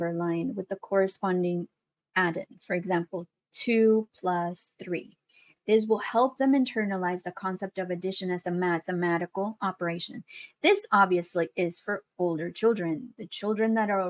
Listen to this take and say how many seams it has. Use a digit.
0